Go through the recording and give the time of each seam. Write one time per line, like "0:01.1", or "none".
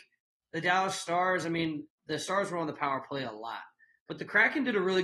0:02.0